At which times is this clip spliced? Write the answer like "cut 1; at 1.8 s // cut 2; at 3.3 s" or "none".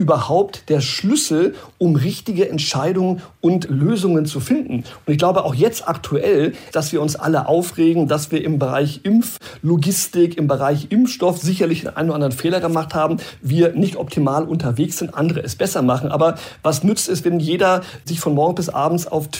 cut 1; at 6.7 s

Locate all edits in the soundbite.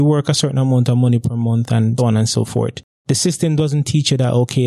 cut 1; at 2.0 s

